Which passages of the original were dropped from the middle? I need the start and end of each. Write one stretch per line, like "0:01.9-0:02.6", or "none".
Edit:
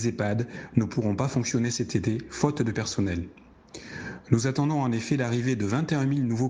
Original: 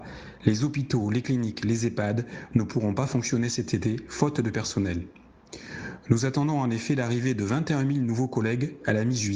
none